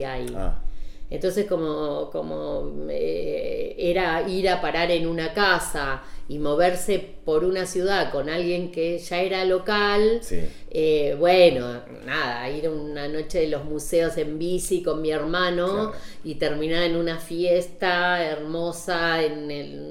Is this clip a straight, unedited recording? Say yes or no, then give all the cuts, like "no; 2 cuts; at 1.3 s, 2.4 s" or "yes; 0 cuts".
yes; 0 cuts